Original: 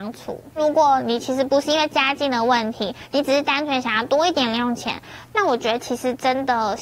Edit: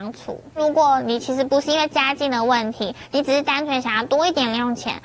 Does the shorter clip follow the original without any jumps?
yes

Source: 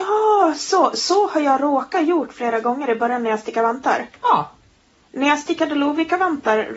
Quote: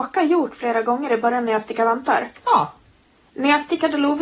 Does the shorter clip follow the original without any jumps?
yes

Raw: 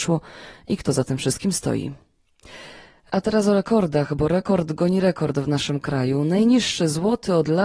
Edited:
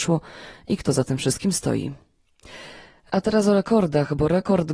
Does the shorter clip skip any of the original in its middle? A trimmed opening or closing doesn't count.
no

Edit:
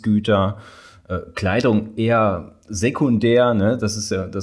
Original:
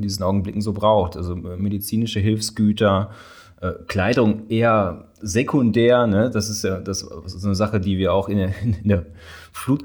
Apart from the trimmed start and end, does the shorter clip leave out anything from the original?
no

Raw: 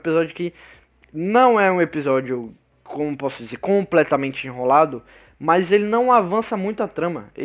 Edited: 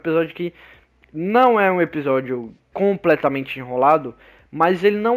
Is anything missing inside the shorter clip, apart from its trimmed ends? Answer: yes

